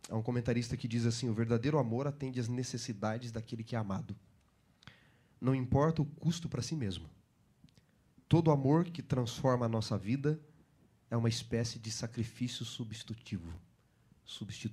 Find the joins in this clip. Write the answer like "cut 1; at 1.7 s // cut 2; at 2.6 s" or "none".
none